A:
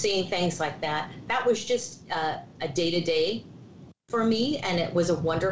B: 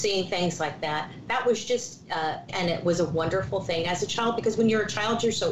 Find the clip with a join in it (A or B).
B